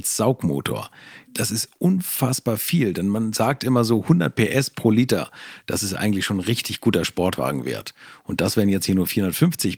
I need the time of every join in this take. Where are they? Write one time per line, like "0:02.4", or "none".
none